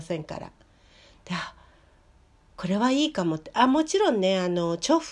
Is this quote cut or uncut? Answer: uncut